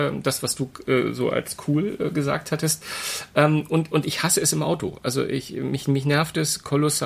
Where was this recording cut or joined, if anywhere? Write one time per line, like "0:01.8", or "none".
none